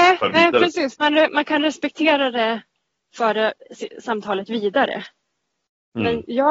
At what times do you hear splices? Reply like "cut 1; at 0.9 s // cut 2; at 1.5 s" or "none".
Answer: none